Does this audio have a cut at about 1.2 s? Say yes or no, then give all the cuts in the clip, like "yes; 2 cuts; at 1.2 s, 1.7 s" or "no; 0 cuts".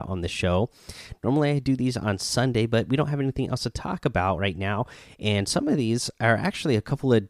no; 0 cuts